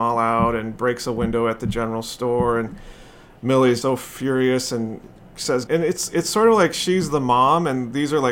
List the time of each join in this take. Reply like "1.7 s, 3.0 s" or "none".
3.8 s, 5.7 s